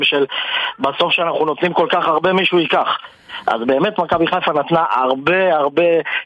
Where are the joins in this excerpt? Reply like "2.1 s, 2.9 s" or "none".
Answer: none